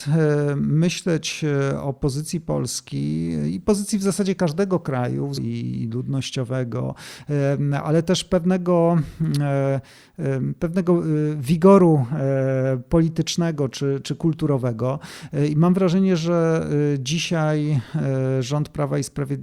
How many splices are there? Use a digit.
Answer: 1